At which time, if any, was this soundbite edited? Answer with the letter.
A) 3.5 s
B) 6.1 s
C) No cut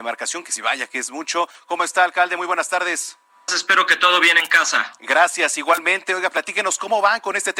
A